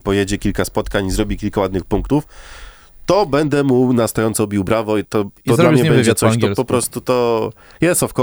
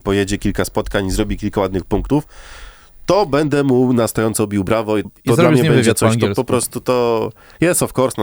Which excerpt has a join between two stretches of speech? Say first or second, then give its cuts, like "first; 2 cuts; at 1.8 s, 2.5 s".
second; 1 cut; at 5.0 s